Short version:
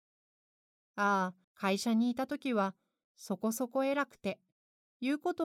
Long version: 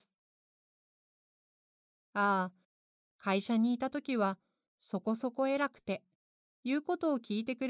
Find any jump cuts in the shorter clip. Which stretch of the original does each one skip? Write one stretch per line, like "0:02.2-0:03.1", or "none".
0:02.6-0:03.1